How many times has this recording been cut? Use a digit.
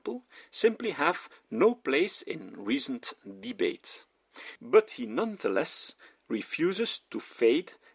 1